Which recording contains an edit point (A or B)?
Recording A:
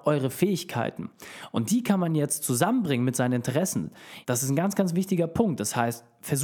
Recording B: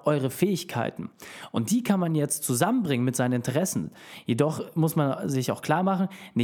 A